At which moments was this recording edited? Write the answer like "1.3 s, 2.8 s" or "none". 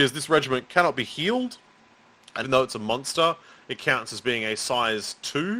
2.4 s